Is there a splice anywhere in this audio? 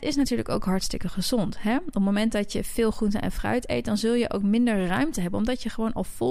no; 0 cuts

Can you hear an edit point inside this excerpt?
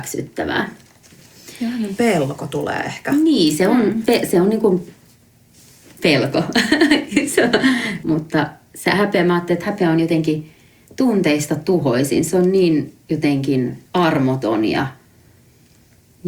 yes; 2 cuts; at 8.0 s, 13.9 s

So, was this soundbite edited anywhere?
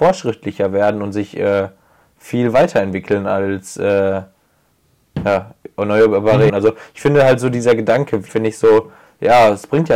yes; 2 cuts; at 6.5 s, 8.3 s

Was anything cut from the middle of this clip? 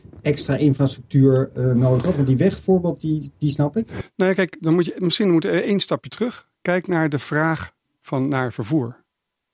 no; 0 cuts

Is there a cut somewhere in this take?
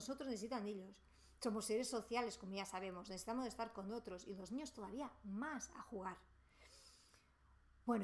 no; 0 cuts

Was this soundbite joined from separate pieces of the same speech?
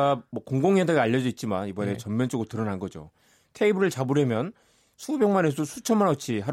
no; 0 cuts

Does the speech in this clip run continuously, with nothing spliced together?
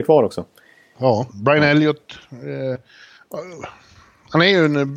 no; 1 cut; at 1.3 s

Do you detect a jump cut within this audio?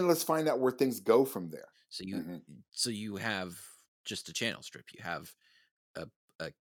yes; 1 cut; at 1.7 s

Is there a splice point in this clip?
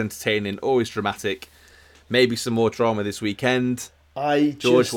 no; 0 cuts

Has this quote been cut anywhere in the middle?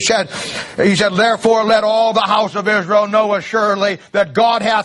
no; 0 cuts

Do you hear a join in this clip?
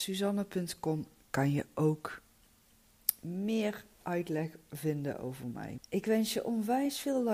yes; 1 cut; at 5.8 s

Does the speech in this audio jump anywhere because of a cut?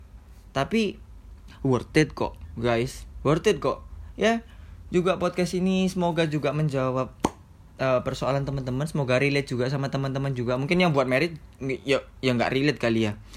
no; 0 cuts

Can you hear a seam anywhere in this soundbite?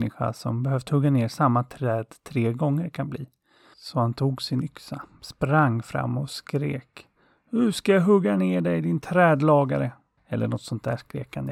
yes; 1 cut; at 10.2 s

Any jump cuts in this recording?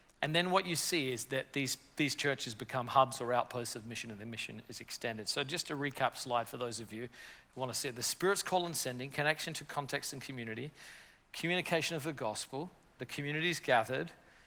yes; 1 cut; at 13.0 s

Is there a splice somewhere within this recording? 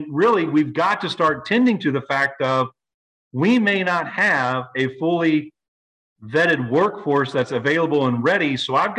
no; 0 cuts

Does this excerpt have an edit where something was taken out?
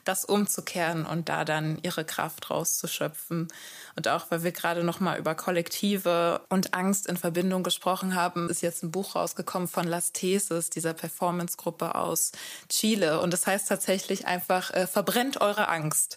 yes; 1 cut; at 8.5 s

